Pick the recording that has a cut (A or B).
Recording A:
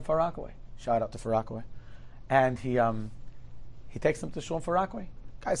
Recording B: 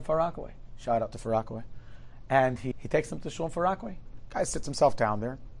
B